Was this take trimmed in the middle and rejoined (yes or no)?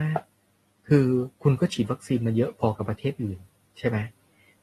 yes